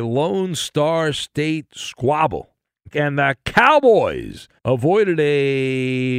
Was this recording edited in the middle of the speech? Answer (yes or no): yes